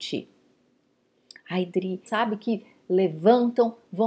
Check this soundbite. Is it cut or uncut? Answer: cut